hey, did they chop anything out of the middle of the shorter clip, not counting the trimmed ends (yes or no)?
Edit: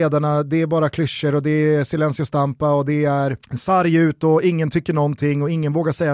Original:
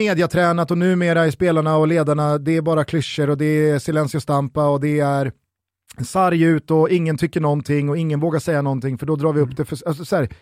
yes